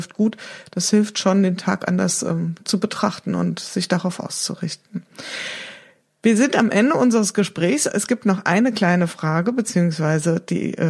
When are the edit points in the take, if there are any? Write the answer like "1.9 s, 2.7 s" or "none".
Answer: none